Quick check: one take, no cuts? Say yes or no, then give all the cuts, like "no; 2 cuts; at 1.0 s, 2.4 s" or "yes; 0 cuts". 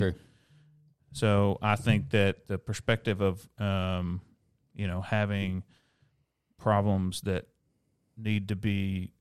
no; 1 cut; at 3.6 s